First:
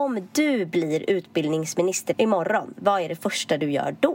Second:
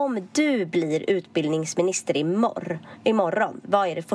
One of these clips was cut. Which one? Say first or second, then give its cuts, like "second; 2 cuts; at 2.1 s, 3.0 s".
first; 1 cut; at 2.1 s